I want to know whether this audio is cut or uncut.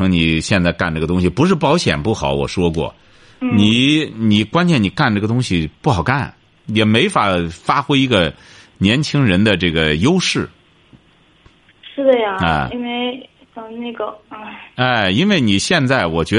uncut